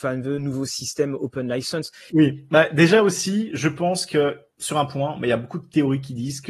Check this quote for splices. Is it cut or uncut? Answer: cut